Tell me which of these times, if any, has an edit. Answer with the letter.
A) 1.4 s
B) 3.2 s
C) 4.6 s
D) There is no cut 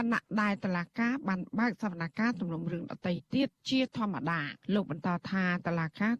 C